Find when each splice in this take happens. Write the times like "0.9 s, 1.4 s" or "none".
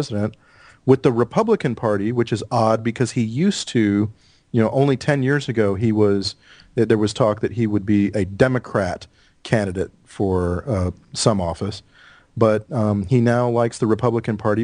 none